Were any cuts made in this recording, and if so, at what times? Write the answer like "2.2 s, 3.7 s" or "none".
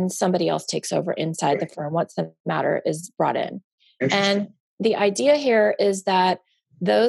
none